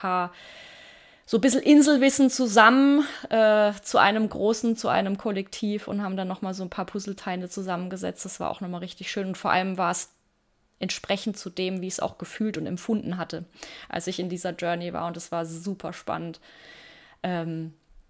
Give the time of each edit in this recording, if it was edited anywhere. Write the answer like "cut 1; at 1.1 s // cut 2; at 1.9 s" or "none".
none